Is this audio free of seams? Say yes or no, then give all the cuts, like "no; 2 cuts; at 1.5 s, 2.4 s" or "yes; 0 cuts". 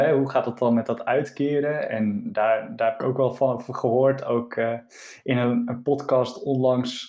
yes; 0 cuts